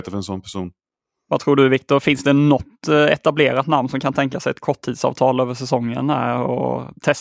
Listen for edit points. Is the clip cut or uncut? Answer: uncut